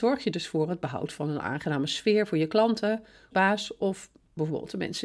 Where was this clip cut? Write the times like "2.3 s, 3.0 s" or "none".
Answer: 3.3 s